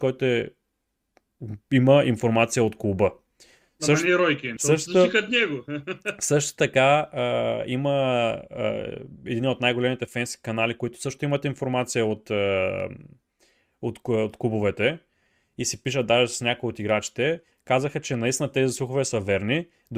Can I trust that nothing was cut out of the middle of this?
no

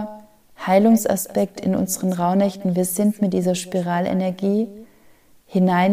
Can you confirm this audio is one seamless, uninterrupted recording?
yes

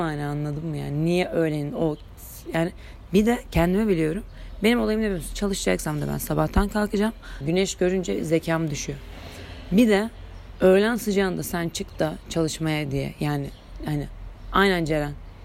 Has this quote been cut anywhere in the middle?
yes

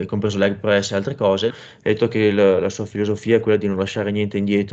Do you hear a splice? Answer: yes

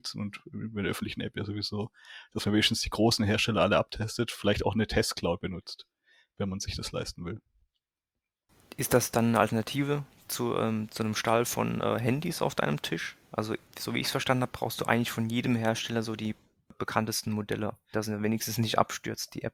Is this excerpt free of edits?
no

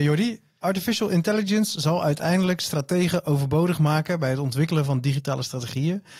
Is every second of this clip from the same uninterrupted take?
yes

